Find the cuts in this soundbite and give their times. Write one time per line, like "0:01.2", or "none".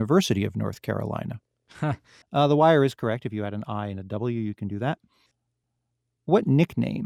0:02.2

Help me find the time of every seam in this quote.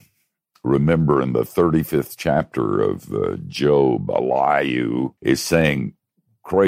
0:05.2

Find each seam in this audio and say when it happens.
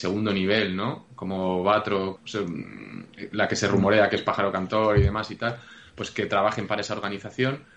0:02.2

